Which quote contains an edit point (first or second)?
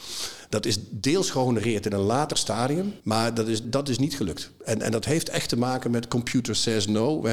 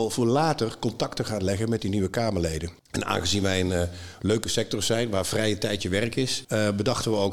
first